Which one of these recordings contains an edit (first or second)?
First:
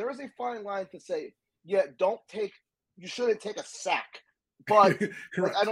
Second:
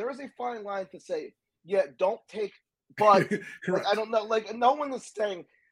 second